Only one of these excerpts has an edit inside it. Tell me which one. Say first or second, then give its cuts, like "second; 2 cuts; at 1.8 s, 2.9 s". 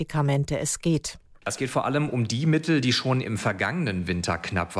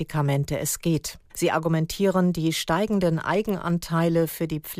second; 1 cut; at 1.3 s